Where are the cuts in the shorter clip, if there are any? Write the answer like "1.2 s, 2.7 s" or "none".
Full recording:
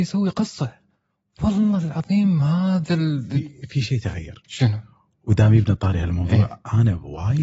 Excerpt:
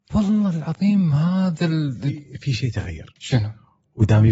none